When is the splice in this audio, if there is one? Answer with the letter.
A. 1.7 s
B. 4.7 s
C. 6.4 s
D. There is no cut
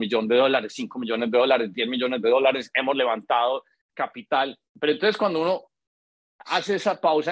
B